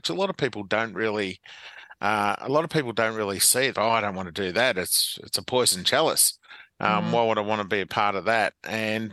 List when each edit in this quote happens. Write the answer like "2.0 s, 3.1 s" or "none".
3.7 s